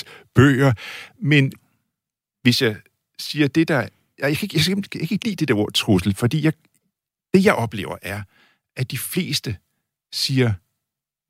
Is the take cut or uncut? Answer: cut